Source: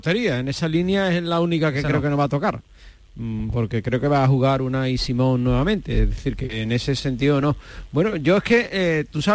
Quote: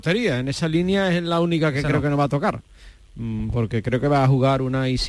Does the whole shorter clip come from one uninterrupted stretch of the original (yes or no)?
yes